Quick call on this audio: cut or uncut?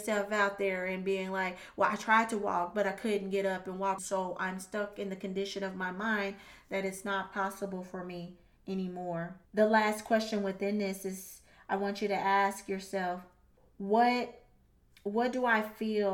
cut